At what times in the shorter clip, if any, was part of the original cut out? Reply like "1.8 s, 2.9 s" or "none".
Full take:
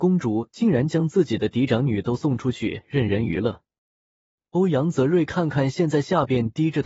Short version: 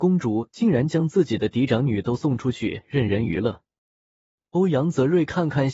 none